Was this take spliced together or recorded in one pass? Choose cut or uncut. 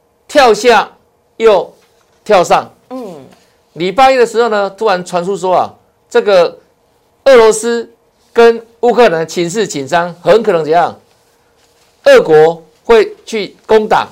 uncut